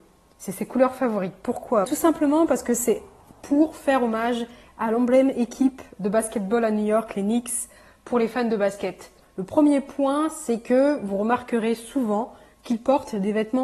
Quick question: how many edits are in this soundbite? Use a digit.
2